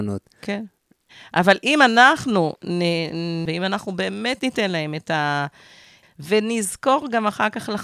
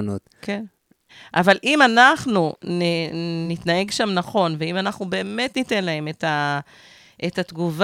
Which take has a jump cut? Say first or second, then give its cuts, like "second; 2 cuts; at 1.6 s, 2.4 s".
first; 2 cuts; at 3.5 s, 6.0 s